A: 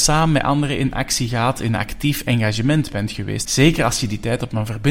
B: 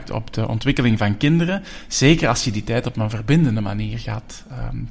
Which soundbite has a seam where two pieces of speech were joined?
A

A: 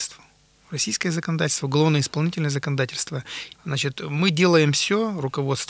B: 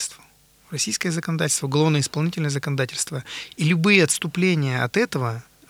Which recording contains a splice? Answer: A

